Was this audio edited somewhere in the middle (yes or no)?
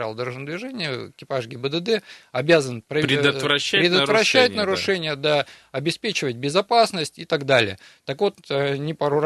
no